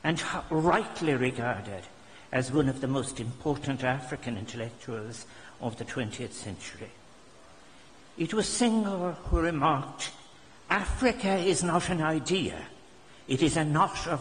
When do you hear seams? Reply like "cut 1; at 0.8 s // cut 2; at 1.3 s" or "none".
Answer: none